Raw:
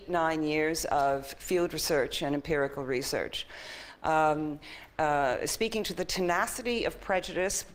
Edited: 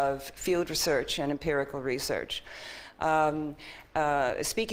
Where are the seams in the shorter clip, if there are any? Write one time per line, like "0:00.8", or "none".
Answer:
none